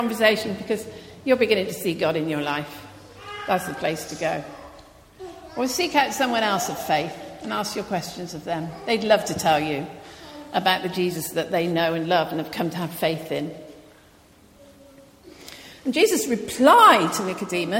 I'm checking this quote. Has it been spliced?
no; 0 cuts

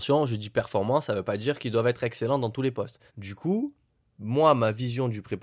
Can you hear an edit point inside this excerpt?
yes; 1 cut; at 3.1 s

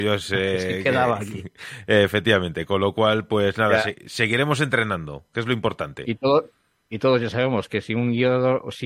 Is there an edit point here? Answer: no; 0 cuts

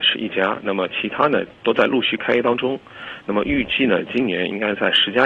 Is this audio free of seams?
yes; 0 cuts

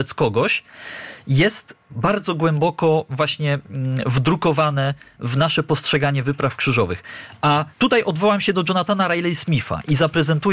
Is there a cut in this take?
yes; 1 cut; at 7.7 s

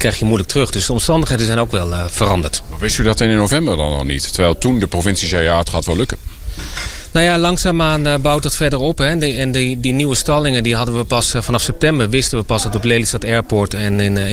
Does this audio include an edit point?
no; 0 cuts

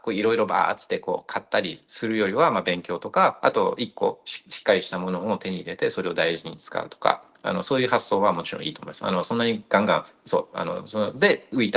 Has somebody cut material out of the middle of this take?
no; 0 cuts

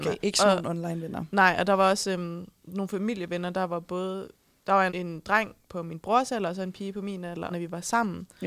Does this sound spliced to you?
yes; 2 cuts; at 4.9 s, 7.5 s

